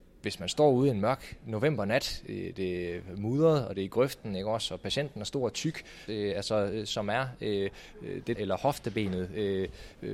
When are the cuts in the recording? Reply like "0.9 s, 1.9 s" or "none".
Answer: 6.1 s, 8.3 s